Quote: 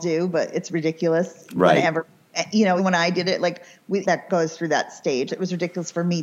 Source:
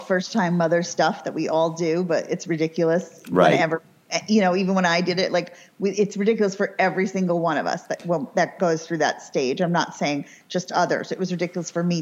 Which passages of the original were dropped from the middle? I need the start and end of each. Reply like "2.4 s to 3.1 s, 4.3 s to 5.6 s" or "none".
4.5 s to 4.7 s, 5.9 s to 8.3 s, 9.6 s to 11.1 s